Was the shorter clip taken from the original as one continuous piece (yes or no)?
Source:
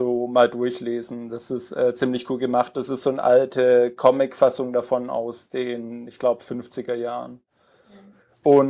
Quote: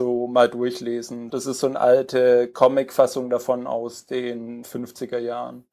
no